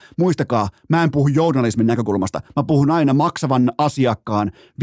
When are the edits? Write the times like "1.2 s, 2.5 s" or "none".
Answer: none